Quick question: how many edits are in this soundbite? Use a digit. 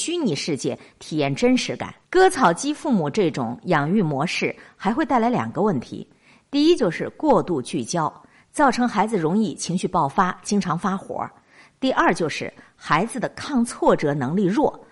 1